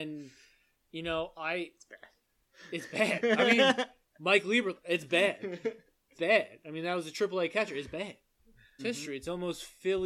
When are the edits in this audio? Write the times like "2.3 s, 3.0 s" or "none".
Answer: 6.1 s, 8.8 s